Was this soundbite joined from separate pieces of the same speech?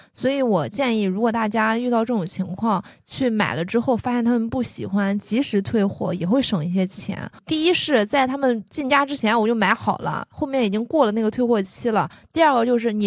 no; 0 cuts

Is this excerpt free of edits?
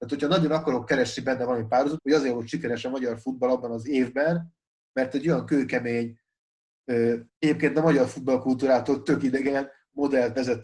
no; 2 cuts; at 2.0 s, 7.3 s

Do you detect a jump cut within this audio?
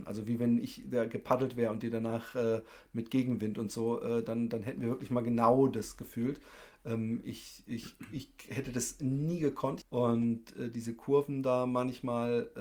yes; 1 cut; at 9.8 s

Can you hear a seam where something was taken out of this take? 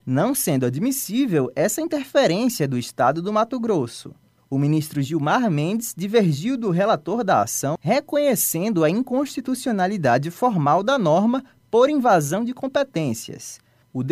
yes; 1 cut; at 7.8 s

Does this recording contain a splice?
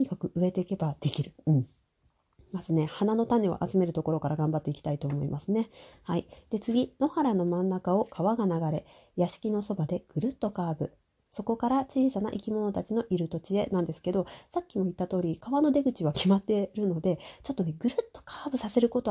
no; 0 cuts

